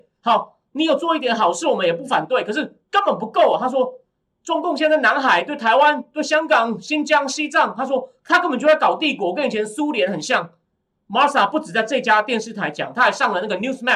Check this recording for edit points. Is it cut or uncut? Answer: uncut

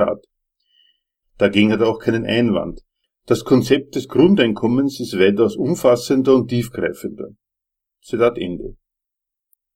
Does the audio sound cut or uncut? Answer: cut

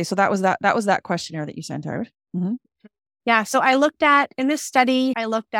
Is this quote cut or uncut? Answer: uncut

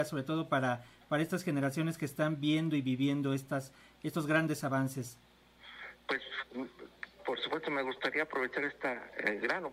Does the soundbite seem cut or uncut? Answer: uncut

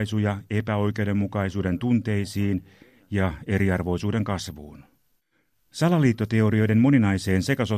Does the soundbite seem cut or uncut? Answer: uncut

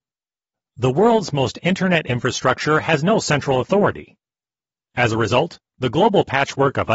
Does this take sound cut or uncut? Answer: cut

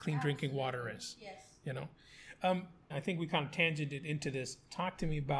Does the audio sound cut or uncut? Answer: cut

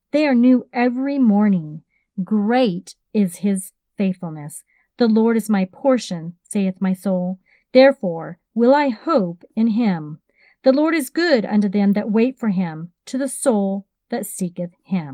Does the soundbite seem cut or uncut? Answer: uncut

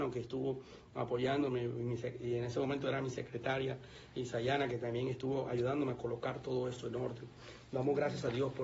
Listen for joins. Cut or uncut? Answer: uncut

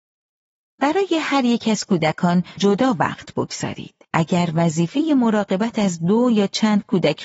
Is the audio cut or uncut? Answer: cut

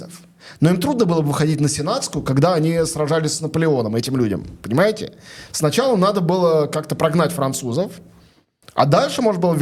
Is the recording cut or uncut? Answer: uncut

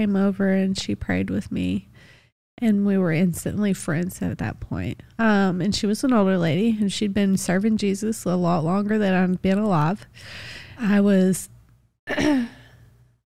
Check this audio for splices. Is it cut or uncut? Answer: cut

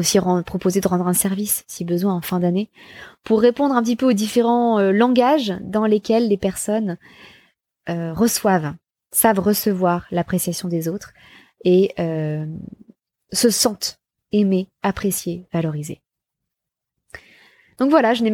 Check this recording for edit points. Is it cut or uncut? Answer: uncut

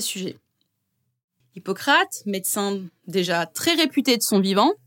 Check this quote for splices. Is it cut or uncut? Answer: cut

